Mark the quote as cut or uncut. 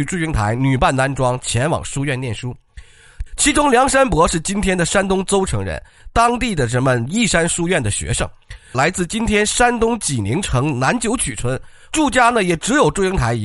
cut